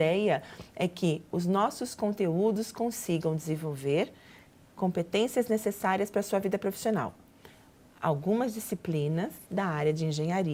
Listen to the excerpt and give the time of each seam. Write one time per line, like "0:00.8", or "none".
0:09.5